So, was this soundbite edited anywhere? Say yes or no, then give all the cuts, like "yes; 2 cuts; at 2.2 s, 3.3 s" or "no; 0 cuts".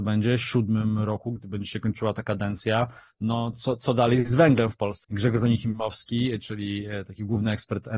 yes; 2 cuts; at 3.5 s, 5.0 s